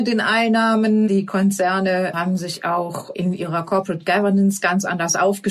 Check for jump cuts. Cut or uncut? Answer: uncut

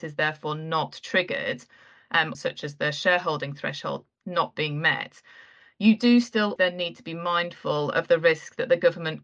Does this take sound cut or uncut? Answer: cut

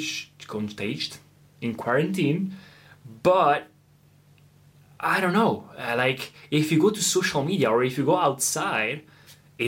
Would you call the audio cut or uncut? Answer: uncut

